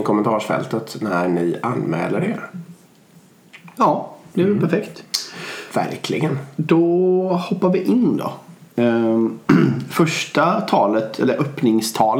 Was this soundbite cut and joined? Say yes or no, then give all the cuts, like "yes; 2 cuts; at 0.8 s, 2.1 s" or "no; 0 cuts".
yes; 1 cut; at 8.7 s